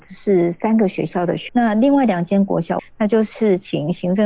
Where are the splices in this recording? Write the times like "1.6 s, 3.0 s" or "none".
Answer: 1.5 s, 2.8 s